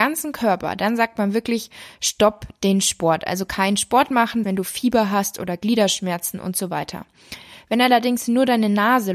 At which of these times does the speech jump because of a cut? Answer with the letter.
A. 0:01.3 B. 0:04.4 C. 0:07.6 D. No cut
B